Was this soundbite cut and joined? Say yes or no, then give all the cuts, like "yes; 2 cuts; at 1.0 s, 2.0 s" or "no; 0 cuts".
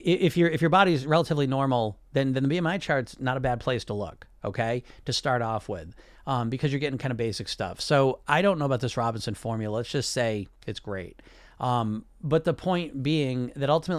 no; 0 cuts